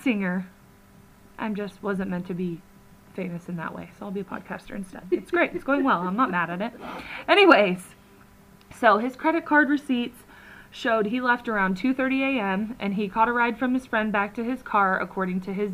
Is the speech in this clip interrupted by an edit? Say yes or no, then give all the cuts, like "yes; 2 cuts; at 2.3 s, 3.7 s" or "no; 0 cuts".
no; 0 cuts